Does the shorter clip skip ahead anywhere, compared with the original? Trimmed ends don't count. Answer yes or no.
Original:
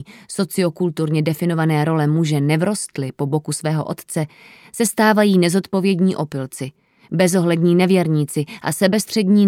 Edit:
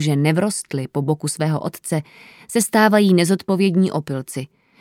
no